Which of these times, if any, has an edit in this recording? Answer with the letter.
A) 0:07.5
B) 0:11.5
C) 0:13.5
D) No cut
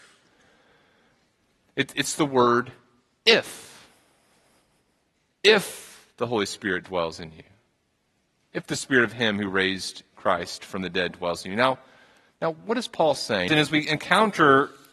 C